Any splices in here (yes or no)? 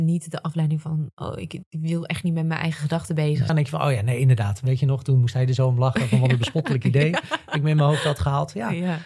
yes